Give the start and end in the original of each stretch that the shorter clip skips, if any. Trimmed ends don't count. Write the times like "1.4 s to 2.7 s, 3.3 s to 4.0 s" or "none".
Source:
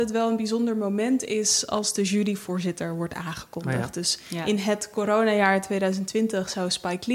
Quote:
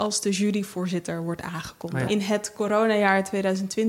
3.8 s to 4.4 s